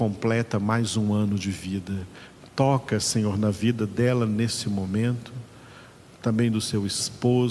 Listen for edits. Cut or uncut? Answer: uncut